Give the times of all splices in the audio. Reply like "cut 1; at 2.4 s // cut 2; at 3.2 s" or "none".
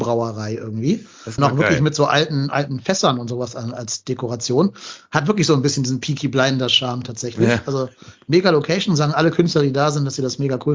cut 1; at 1.4 s